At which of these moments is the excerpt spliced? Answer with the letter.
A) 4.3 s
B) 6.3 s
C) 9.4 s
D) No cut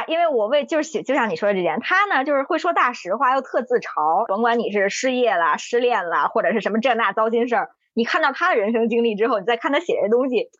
A